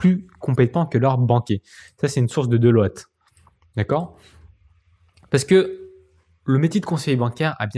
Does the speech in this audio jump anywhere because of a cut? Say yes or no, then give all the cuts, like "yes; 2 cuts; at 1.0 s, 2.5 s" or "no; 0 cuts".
no; 0 cuts